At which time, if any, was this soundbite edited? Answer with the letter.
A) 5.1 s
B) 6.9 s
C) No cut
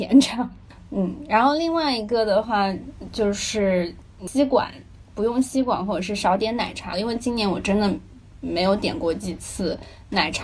B